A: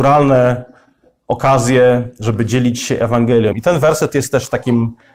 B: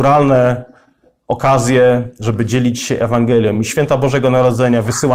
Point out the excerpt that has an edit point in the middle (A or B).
A